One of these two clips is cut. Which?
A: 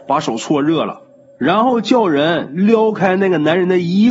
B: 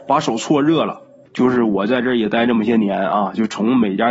B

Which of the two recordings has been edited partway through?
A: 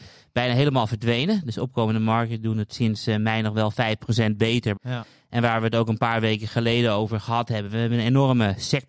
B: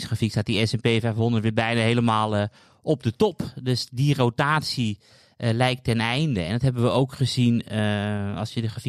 A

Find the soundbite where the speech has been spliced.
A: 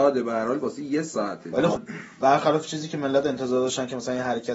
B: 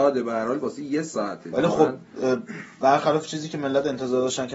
A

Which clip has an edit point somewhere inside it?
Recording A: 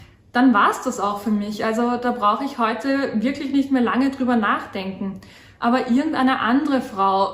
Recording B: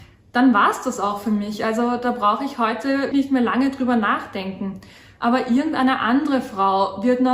B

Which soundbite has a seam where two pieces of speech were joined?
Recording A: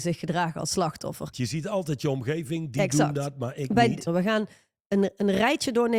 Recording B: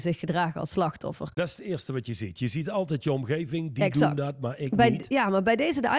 A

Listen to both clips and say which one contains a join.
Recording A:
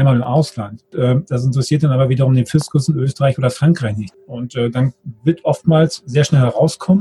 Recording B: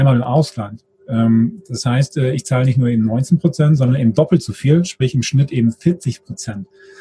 A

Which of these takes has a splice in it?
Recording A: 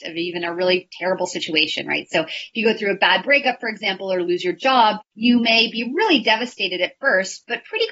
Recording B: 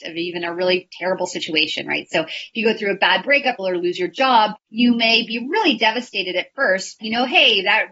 B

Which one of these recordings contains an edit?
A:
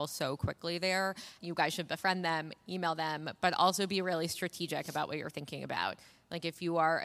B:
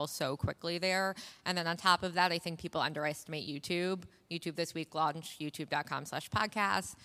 A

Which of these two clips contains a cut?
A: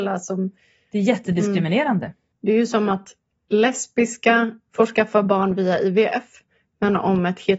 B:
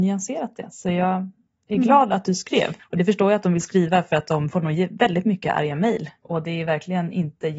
B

